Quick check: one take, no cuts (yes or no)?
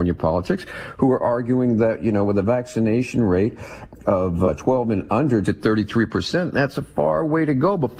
no